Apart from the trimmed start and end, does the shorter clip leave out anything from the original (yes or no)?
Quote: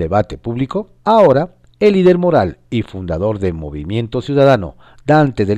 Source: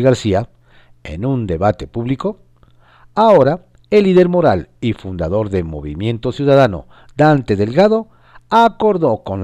yes